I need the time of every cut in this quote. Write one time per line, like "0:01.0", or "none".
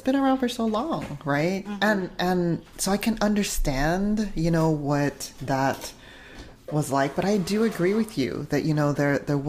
0:01.7
0:06.6